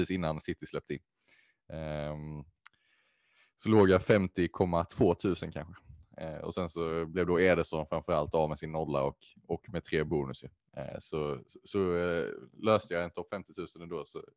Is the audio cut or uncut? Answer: uncut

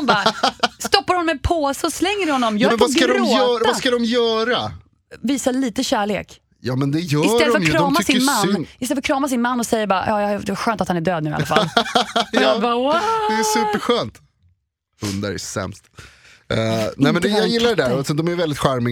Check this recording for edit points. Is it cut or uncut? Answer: uncut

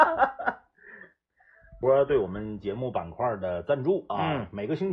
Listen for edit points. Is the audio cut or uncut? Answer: uncut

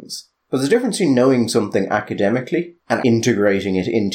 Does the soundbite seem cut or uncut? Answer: cut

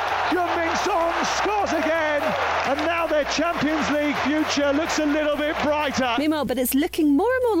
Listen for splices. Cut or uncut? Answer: cut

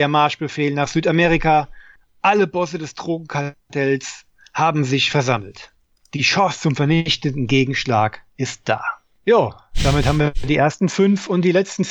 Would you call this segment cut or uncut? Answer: cut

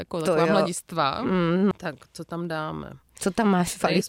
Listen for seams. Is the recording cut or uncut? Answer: cut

